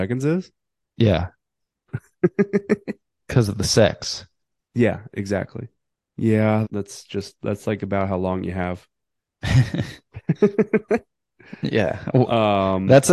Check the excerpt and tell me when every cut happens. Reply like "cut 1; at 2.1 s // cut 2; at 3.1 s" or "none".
cut 1; at 6.6 s